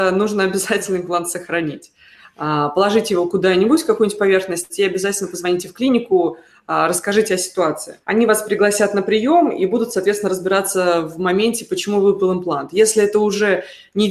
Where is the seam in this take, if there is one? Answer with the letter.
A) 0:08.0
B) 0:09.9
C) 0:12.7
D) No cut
A